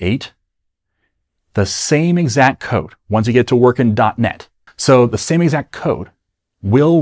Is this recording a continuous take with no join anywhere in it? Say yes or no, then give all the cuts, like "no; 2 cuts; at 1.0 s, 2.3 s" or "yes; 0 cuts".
no; 1 cut; at 4.7 s